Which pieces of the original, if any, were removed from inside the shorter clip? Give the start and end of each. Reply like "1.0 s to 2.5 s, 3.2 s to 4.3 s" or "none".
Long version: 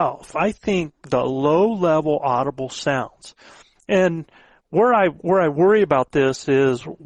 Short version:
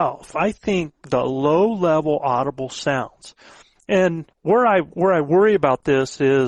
4.3 s to 4.6 s